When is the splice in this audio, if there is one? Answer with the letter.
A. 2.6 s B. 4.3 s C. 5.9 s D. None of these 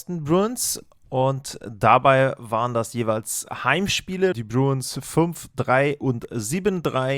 B